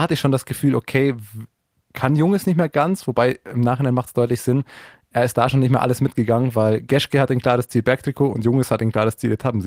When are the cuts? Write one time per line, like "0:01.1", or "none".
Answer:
none